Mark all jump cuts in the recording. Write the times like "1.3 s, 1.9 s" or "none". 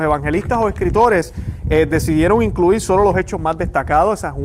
none

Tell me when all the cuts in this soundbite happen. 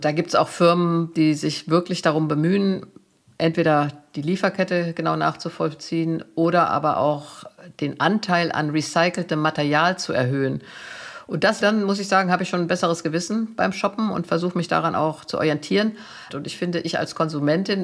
11.6 s, 16.3 s

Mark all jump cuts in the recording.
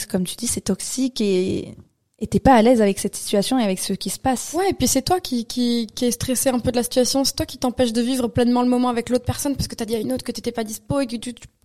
none

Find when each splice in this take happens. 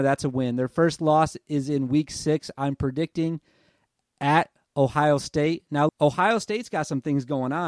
5.9 s

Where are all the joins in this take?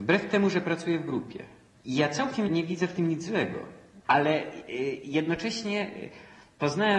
4.0 s

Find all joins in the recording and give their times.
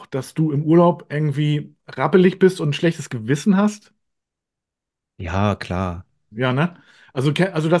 none

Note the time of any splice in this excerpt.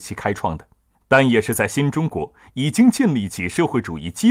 none

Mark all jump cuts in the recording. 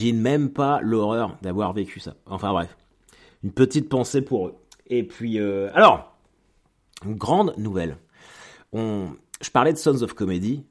none

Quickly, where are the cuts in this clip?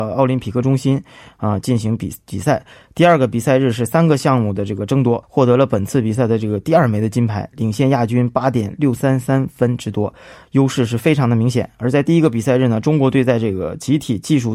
5.2 s, 9.0 s

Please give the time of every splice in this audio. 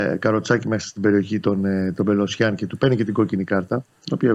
none

